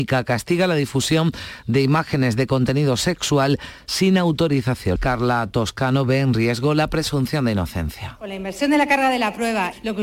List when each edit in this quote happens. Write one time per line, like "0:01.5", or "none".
0:05.0